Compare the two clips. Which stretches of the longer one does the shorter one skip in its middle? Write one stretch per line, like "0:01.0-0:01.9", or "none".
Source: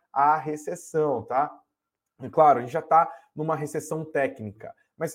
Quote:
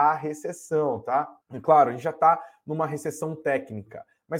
0:01.6-0:02.1